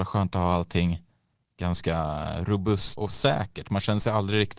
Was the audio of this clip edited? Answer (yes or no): yes